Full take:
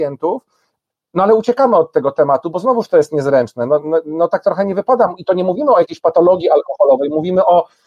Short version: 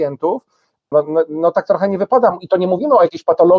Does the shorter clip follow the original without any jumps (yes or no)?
no